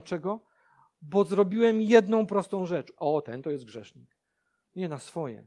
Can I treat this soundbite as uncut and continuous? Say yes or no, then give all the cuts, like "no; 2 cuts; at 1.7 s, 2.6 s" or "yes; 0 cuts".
no; 1 cut; at 3.0 s